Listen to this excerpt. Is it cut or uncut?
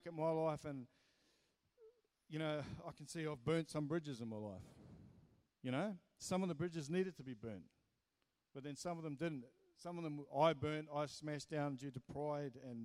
uncut